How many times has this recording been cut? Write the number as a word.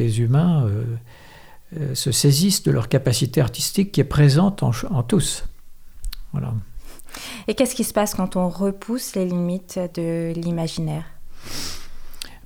zero